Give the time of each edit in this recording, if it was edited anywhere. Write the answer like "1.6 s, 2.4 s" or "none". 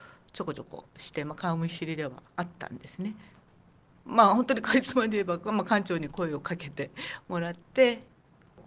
2.3 s